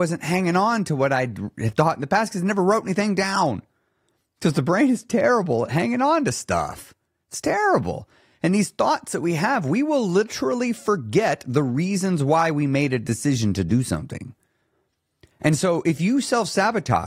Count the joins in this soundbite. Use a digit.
0